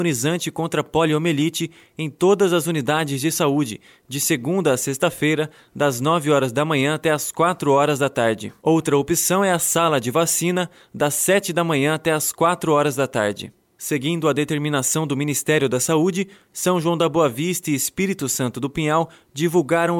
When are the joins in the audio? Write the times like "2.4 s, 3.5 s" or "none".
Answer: 13.6 s

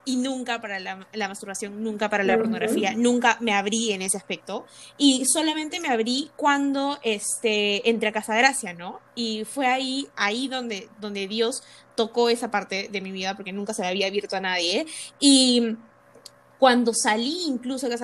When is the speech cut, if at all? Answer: none

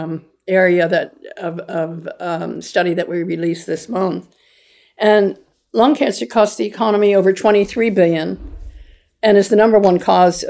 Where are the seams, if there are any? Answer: none

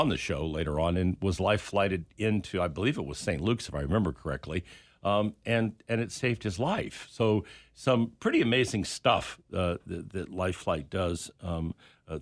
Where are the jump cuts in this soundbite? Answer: none

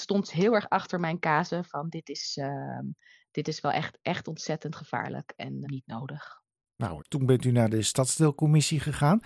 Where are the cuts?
5.6 s, 7.0 s

